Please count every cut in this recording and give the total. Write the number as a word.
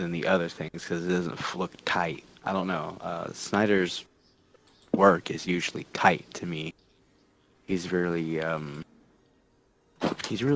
zero